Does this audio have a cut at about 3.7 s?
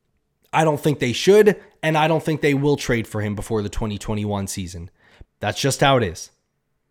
no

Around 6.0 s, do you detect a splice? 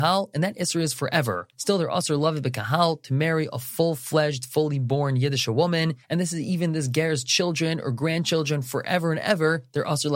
no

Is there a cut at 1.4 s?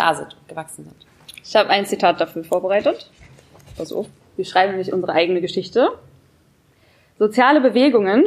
no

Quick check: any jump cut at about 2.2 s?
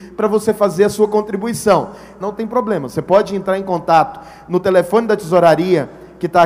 yes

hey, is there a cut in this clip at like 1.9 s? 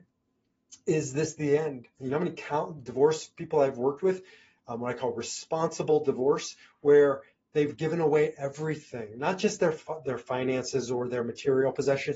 yes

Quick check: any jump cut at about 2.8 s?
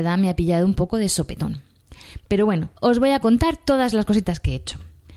yes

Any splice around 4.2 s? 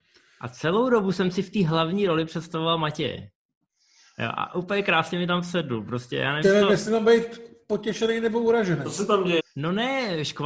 no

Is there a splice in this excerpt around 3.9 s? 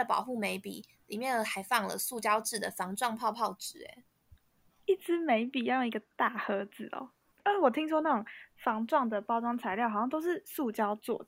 no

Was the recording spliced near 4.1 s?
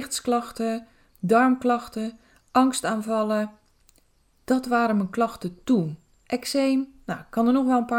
no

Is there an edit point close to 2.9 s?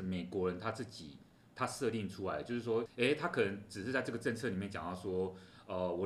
yes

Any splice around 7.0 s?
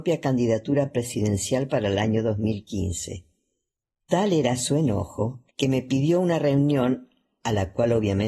no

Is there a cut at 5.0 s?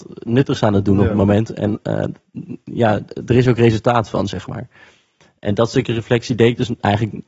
no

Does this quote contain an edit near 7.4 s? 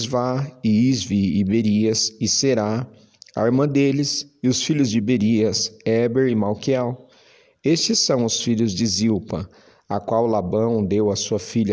no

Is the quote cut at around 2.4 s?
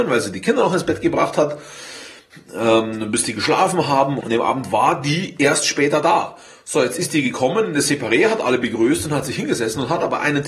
no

